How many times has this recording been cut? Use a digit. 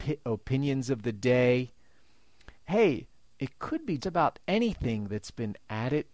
2